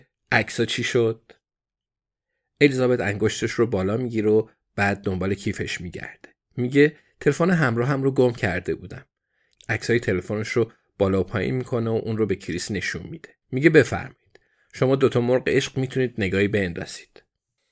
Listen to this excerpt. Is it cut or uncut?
cut